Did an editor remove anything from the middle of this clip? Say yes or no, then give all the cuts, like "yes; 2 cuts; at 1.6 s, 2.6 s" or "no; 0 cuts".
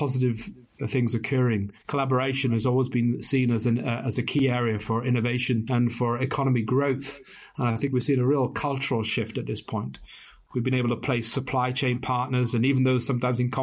yes; 1 cut; at 1.8 s